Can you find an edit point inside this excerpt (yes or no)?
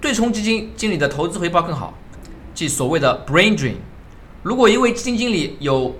yes